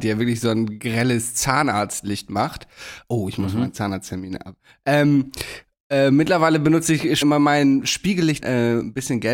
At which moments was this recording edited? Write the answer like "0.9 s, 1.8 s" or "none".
7.2 s, 8.4 s